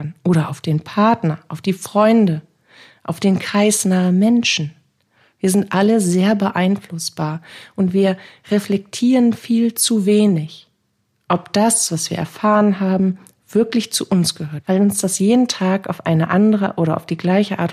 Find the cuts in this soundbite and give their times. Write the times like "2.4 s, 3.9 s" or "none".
14.6 s